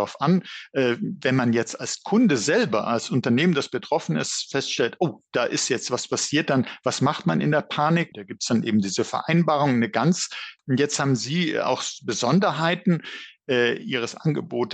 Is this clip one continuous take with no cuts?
no; 2 cuts; at 8.1 s, 10.6 s

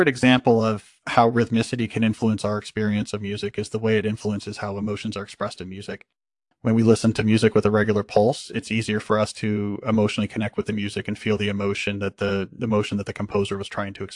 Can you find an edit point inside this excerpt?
no; 0 cuts

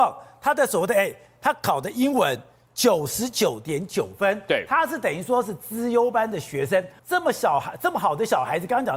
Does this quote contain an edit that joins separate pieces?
yes; 1 cut; at 7.0 s

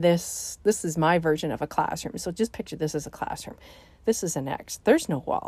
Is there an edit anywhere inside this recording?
no; 0 cuts

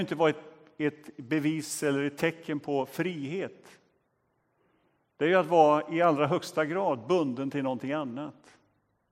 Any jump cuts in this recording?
no; 0 cuts

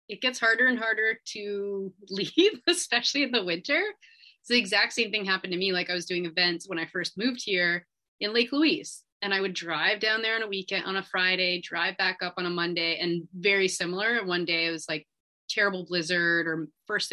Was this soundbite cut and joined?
no; 0 cuts

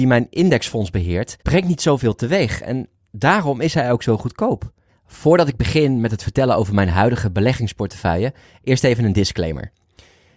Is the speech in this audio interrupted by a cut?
yes; 2 cuts; at 1.4 s, 4.9 s

